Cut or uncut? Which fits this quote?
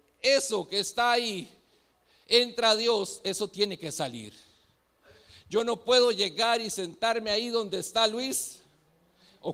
uncut